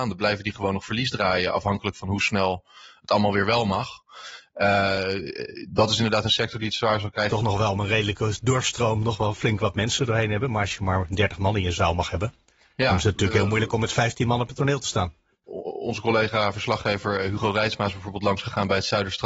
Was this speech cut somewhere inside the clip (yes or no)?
yes